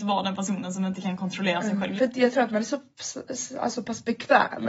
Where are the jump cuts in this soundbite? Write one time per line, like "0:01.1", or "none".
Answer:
0:02.0